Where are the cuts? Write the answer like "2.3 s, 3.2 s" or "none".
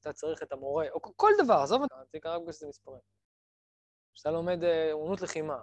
1.9 s